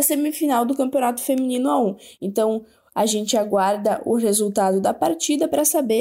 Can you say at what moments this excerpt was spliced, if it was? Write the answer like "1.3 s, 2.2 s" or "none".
none